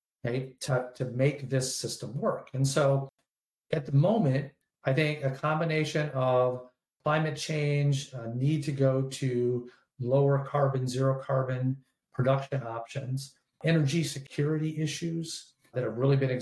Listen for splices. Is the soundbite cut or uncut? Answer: uncut